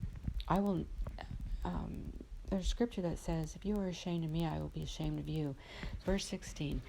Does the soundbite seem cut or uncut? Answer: cut